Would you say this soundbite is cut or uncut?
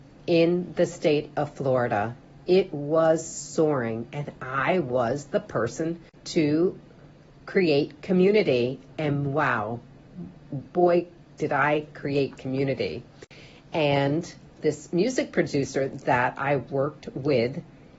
uncut